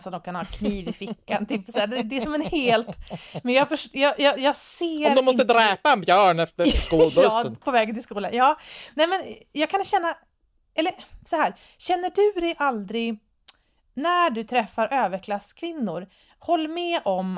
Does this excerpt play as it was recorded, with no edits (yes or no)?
yes